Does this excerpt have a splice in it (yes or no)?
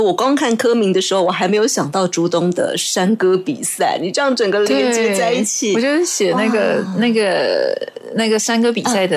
no